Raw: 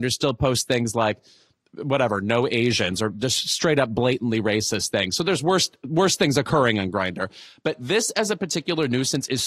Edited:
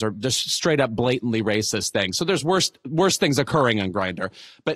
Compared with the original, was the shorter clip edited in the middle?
no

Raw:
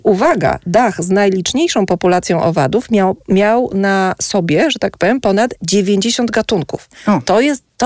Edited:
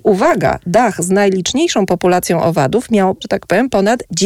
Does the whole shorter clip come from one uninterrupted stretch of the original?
no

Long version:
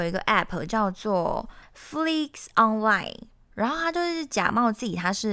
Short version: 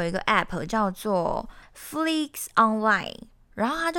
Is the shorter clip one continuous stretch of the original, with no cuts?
yes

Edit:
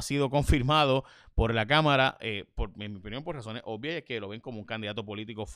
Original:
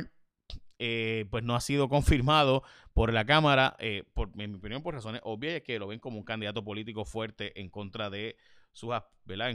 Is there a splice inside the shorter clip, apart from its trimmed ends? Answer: no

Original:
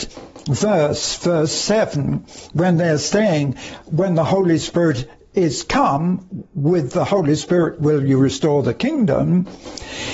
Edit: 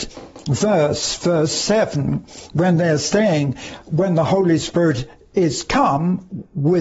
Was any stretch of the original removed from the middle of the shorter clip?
no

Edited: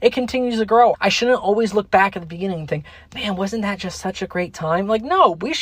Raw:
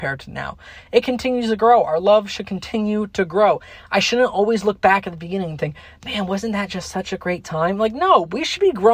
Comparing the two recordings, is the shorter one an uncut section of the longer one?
no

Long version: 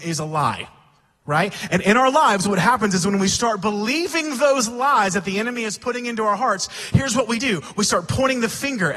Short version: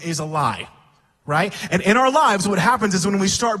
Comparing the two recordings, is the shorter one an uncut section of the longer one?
yes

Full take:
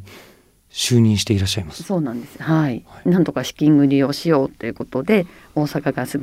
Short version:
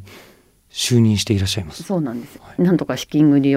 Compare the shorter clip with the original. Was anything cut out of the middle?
yes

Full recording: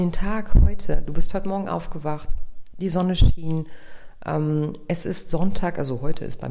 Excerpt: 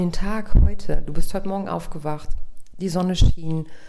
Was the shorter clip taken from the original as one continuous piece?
yes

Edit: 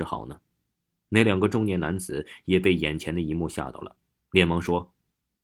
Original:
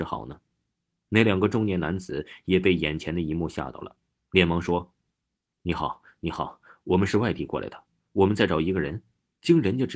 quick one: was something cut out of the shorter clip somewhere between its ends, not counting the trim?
no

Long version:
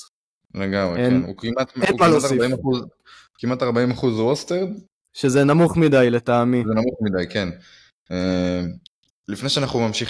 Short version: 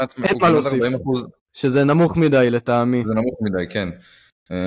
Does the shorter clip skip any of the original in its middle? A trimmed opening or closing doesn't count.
yes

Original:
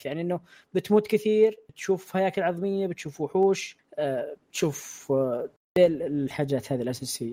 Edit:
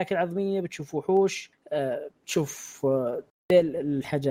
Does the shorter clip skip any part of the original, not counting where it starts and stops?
no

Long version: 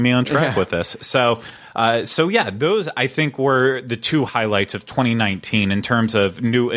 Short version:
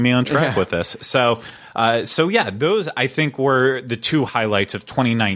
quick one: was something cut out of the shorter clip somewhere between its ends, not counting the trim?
no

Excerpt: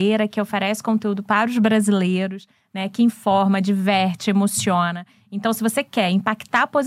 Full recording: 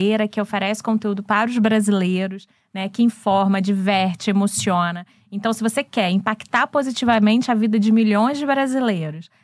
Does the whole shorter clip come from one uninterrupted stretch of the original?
yes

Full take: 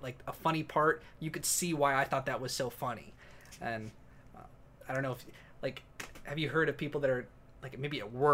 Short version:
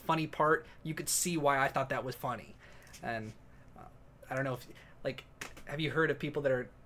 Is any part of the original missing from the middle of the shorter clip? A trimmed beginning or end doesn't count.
yes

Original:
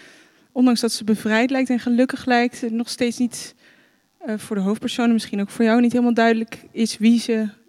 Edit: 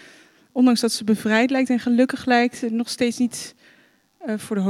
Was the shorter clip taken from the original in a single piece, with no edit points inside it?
yes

